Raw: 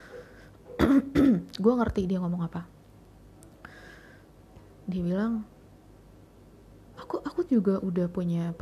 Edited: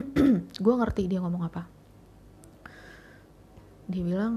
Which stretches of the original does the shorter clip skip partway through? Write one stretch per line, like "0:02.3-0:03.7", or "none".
none